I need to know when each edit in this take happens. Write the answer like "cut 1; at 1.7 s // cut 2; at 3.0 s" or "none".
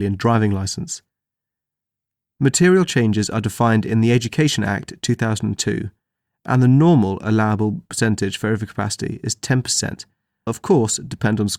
cut 1; at 2.3 s // cut 2; at 10.5 s